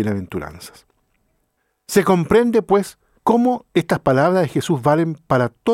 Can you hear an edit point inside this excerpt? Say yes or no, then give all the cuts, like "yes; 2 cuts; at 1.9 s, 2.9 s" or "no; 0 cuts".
no; 0 cuts